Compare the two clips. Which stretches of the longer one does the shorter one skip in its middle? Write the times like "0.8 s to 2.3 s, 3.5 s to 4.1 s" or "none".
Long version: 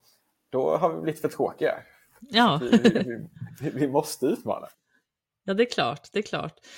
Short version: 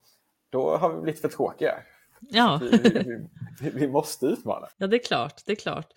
4.7 s to 5.4 s